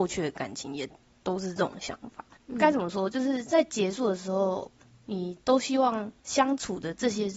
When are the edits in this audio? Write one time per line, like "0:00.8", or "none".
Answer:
none